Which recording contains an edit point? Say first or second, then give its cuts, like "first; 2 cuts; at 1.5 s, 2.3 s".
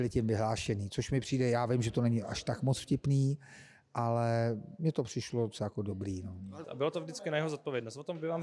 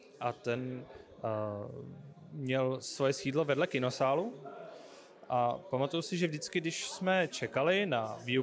first; 1 cut; at 6.6 s